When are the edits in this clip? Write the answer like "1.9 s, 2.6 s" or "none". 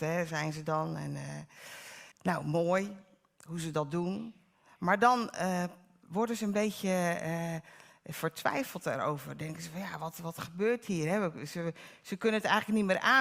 2.1 s